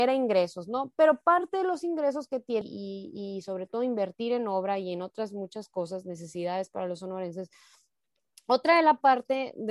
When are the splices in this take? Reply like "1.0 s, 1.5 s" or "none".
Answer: 2.6 s